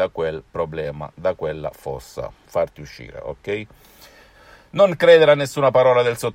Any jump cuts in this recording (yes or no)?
no